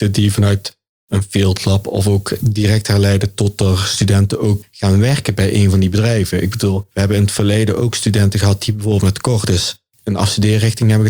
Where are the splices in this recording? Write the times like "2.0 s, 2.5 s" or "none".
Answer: none